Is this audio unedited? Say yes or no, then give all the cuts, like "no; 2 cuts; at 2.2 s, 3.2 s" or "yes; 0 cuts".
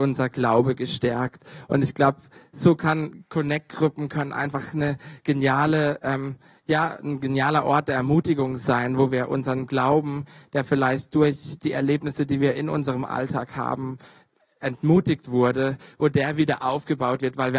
yes; 0 cuts